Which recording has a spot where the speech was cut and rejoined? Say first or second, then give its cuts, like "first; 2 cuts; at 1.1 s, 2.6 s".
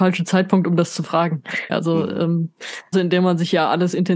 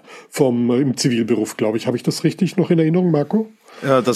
first; 2 cuts; at 1.7 s, 2.9 s